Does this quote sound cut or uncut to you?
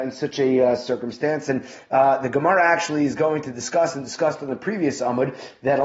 uncut